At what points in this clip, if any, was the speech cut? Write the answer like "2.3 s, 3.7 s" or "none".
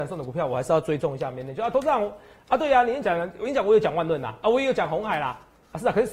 3.0 s